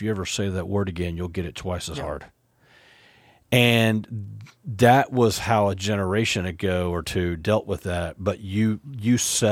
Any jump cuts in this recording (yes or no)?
no